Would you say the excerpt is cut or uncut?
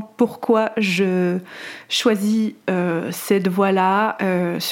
uncut